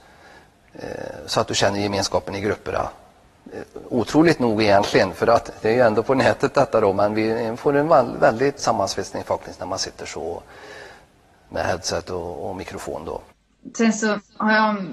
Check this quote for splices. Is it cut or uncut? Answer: cut